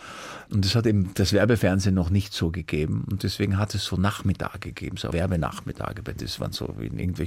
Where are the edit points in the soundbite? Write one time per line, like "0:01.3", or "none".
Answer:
0:05.1